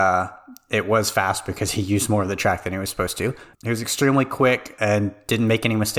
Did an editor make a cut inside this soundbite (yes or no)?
yes